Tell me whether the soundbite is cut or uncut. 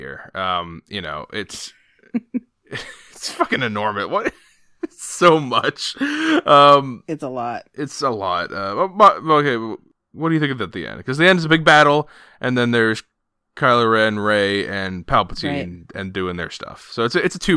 uncut